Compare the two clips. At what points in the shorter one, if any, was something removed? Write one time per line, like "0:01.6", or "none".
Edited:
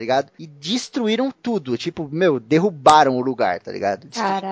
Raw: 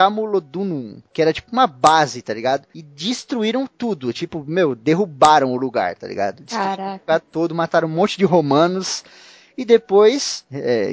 none